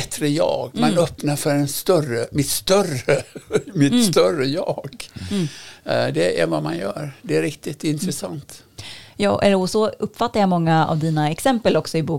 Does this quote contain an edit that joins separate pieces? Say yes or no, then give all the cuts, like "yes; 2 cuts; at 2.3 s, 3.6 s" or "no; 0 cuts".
no; 0 cuts